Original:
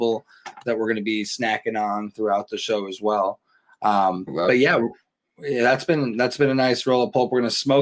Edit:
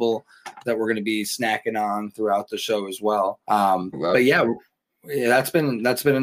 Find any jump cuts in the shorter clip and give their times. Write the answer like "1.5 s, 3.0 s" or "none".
3.4 s